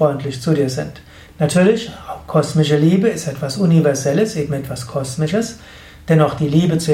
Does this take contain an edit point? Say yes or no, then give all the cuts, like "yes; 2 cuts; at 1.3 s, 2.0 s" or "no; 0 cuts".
yes; 1 cut; at 1.3 s